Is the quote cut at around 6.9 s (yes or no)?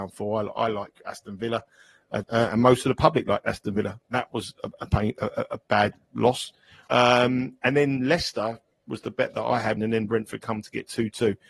yes